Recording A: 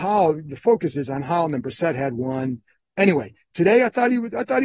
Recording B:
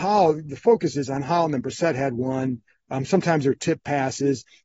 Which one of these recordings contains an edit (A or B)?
A